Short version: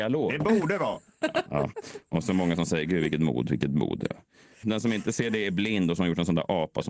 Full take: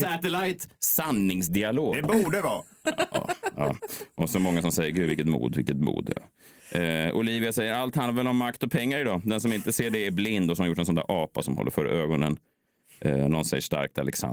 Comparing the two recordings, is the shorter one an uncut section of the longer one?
no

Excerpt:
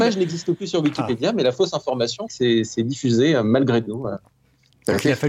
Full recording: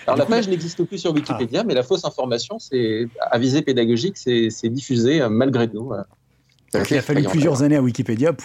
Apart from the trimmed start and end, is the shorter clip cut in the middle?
yes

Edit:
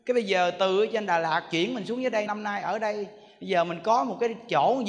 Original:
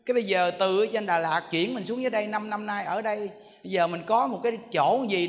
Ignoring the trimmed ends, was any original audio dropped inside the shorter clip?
yes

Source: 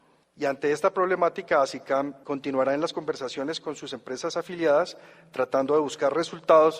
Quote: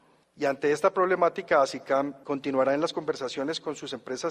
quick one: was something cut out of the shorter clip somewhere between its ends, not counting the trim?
no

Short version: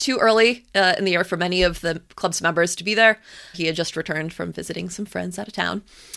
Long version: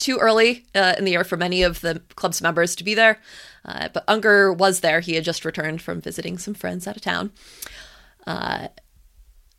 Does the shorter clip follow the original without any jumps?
no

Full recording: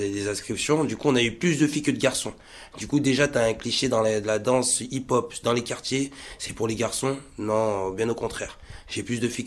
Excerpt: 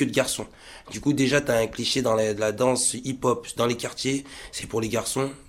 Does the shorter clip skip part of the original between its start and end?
no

